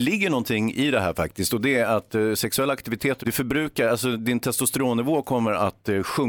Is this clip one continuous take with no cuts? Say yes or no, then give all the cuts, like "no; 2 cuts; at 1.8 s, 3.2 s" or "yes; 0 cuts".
no; 1 cut; at 3.2 s